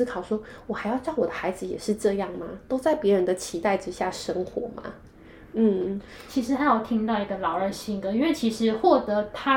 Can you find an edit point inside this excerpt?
no; 0 cuts

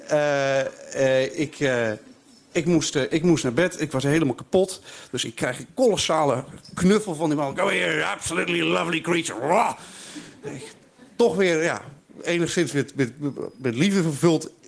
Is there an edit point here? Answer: no; 0 cuts

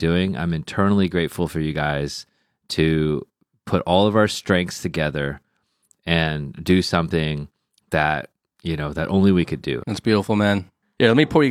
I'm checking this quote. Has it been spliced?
yes; 1 cut; at 9.8 s

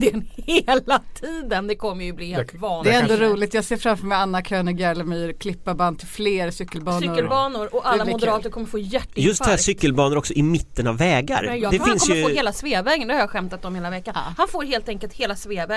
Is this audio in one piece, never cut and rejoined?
yes; 0 cuts

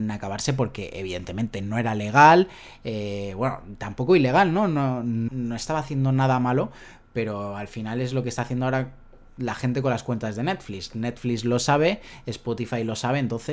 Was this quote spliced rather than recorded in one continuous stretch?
yes; 1 cut; at 5.3 s

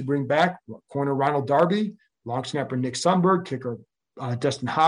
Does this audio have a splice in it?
no; 0 cuts

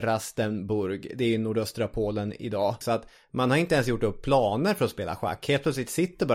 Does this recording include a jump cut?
yes; 1 cut; at 2.8 s

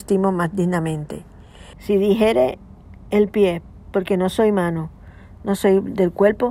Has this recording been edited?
yes; 1 cut; at 1.7 s

